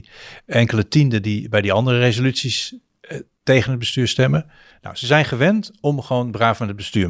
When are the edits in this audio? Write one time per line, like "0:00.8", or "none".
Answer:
0:04.7